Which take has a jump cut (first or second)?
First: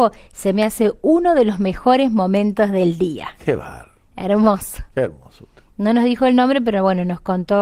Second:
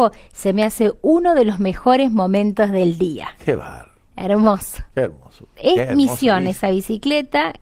second